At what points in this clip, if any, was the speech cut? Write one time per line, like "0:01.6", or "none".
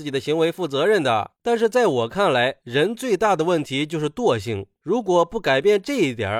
0:01.4